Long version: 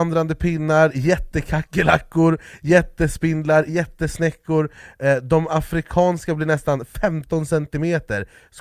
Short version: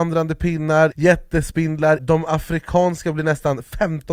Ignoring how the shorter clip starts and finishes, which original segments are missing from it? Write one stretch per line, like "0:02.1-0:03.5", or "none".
0:00.9-0:02.6
0:03.6-0:05.2